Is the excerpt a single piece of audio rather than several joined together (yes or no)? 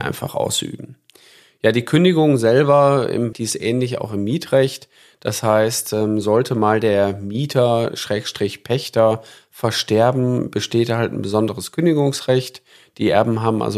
no